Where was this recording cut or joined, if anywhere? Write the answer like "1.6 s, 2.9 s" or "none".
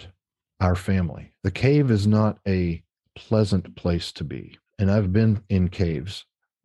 1.4 s, 4.7 s

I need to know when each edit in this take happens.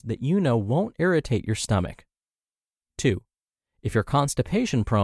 none

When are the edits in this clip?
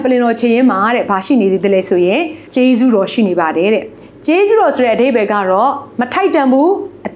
2.5 s

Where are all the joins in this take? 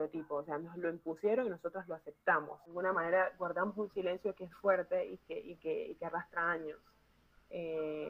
4.5 s

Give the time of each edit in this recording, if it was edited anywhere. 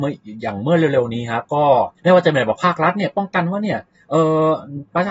none

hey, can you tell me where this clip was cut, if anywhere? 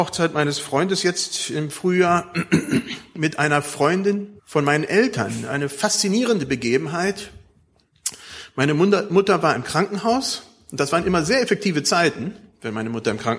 4.4 s

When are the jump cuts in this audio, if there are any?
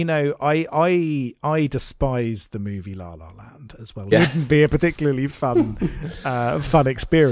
4.1 s

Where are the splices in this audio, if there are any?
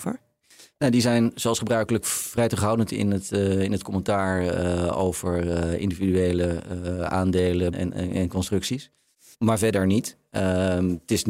7.7 s, 9.3 s

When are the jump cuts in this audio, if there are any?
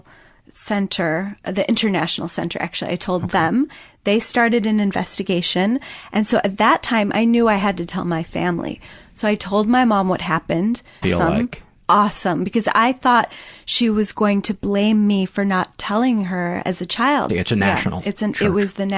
11.0 s, 17.3 s

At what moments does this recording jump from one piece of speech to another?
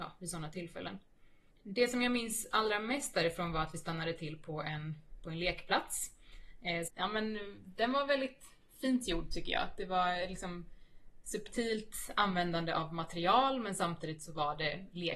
6.9 s

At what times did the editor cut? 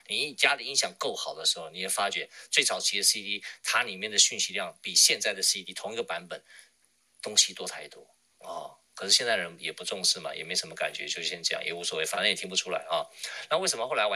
none

